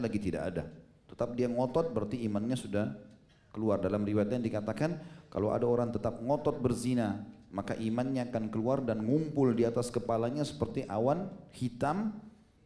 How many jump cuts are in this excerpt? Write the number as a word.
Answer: one